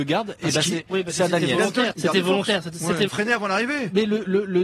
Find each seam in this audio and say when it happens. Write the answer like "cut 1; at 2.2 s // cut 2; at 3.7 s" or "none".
cut 1; at 1.9 s // cut 2; at 3.1 s